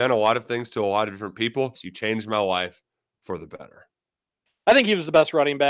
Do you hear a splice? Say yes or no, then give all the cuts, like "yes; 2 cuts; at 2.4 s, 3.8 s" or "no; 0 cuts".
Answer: yes; 1 cut; at 1.7 s